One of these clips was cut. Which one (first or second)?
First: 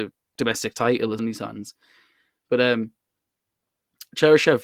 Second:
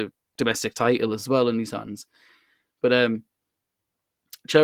first